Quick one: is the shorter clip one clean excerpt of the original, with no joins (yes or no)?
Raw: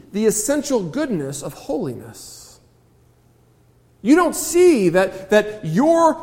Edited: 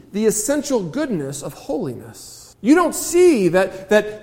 no